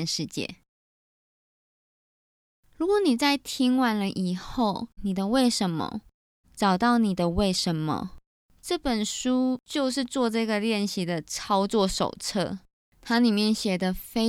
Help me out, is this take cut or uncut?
cut